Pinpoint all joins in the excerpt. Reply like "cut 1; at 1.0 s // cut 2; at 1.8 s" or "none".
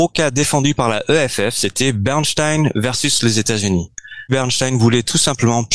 cut 1; at 4.3 s